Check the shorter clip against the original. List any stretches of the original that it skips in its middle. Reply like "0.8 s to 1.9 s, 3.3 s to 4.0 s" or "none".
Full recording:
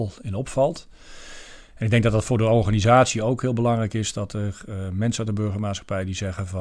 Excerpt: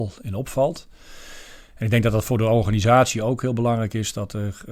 none